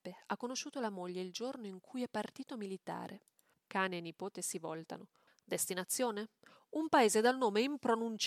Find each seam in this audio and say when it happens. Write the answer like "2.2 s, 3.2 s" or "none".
3.5 s, 5.3 s